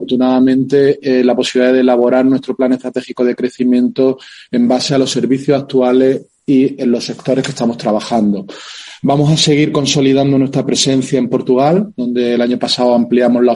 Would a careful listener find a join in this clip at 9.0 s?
no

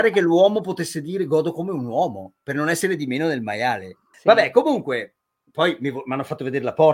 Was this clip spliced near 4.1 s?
yes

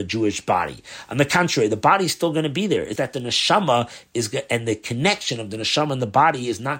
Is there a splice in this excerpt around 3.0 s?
yes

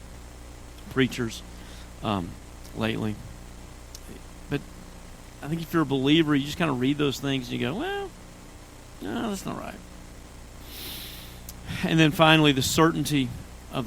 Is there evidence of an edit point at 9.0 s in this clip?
yes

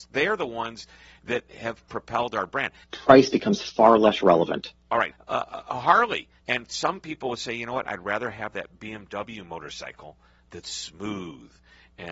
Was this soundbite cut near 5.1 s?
yes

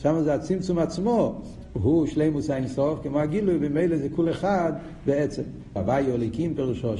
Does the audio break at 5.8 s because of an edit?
yes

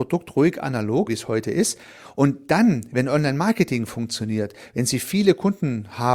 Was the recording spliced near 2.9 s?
no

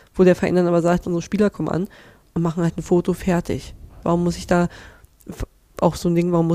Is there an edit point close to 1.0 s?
yes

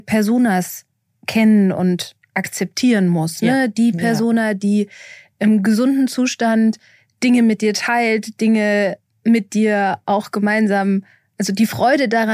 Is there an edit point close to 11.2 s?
no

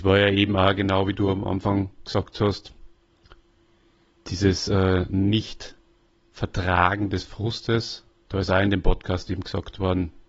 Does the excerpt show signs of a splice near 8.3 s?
yes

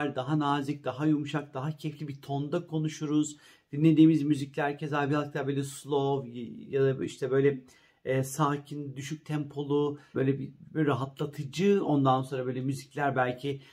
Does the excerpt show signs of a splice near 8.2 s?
no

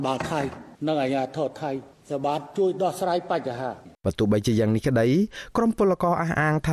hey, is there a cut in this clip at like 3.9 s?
yes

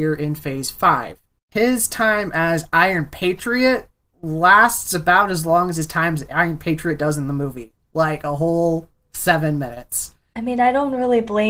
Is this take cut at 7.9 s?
no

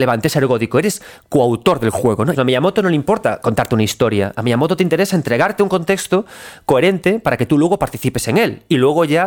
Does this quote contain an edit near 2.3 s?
yes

